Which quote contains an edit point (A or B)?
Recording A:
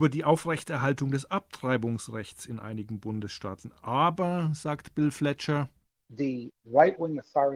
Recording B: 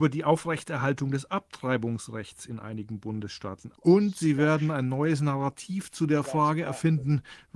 B